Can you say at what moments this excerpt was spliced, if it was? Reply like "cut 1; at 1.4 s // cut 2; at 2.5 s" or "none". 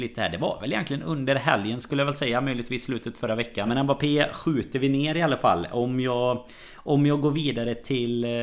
cut 1; at 3.7 s